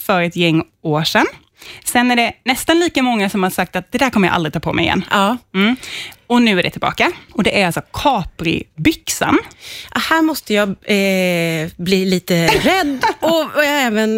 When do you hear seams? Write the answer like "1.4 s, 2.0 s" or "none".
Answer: 7.3 s